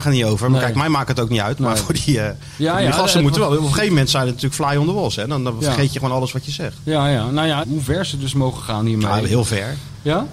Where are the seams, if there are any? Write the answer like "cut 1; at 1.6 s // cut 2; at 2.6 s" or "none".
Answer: cut 1; at 7.6 s